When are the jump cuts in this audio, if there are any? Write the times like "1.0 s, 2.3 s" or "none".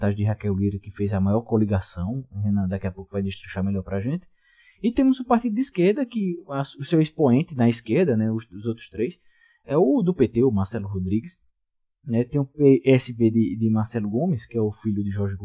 none